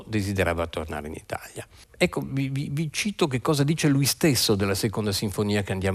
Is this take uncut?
no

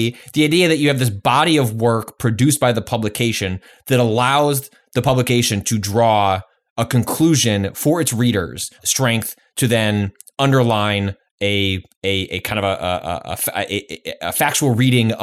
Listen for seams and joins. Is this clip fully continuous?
no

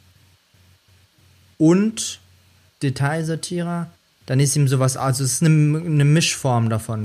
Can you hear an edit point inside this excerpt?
no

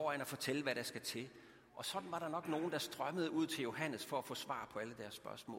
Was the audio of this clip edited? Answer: no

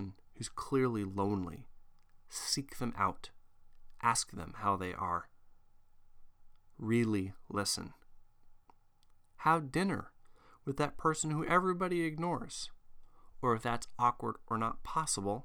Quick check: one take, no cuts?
yes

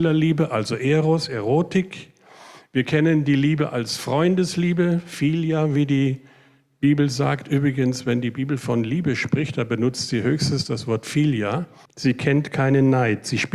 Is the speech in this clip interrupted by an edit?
yes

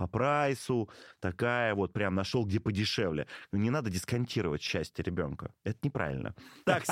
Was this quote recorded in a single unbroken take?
yes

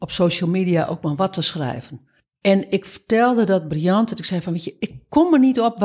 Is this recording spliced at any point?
no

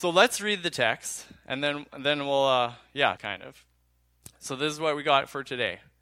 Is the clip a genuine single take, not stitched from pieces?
no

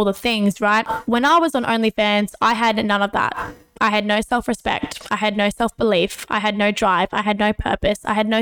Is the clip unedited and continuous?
yes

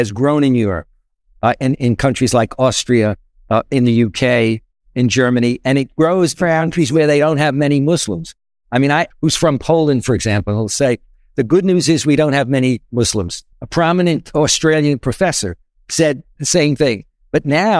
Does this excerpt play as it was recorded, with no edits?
no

